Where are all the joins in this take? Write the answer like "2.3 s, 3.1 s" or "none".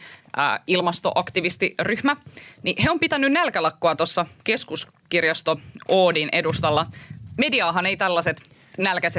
none